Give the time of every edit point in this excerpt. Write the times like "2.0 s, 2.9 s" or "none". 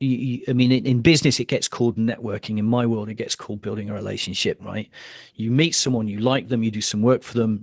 4.6 s